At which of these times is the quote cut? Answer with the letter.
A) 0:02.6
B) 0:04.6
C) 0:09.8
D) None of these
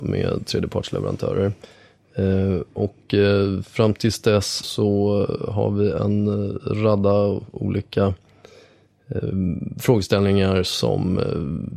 B